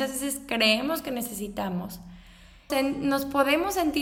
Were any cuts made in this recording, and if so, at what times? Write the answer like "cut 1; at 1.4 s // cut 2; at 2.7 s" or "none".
cut 1; at 2.7 s